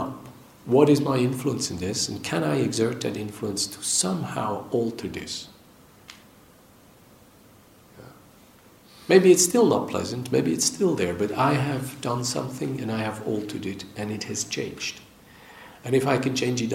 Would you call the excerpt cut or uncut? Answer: uncut